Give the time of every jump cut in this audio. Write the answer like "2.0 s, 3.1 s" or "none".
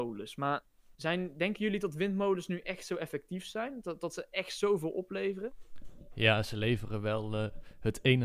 0.9 s